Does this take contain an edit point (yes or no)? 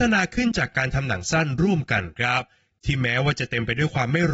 no